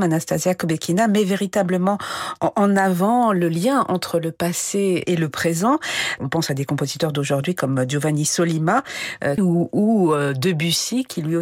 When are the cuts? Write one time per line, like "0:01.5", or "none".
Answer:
0:09.4